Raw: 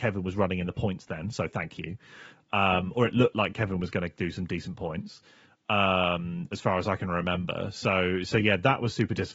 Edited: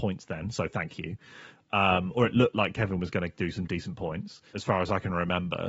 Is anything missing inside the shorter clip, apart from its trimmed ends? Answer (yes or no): yes